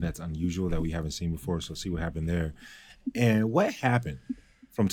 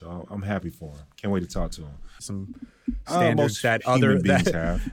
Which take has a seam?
second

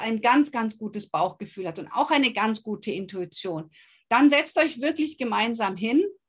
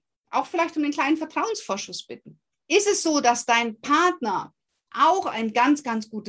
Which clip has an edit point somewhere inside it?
second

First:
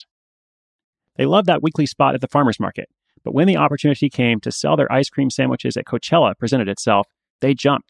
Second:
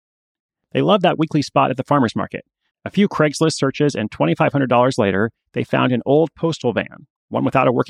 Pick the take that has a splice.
second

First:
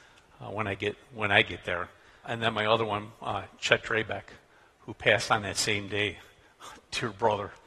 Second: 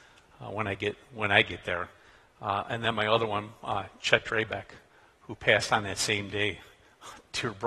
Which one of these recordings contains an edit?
first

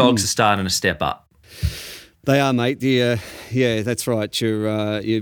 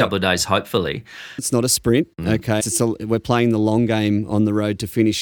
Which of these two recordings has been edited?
second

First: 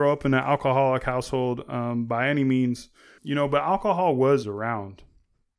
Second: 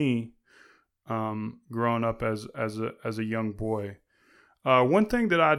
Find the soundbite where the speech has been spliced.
first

